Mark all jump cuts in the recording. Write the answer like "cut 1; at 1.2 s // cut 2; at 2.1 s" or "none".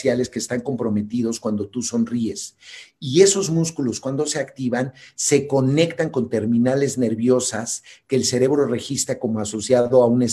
none